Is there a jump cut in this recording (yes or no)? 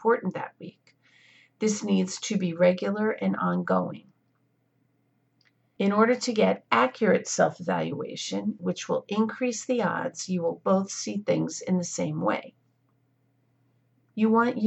yes